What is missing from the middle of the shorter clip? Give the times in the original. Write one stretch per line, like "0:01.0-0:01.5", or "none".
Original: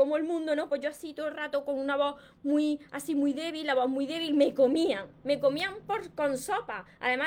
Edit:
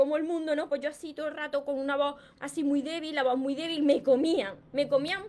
0:02.4-0:02.9